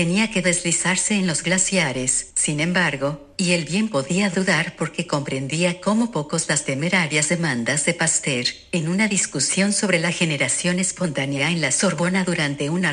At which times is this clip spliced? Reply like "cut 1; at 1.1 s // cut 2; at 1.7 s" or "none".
cut 1; at 2.3 s // cut 2; at 3.3 s